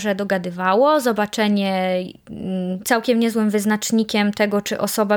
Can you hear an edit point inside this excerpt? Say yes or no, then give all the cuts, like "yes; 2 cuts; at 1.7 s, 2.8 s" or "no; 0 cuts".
yes; 1 cut; at 2.8 s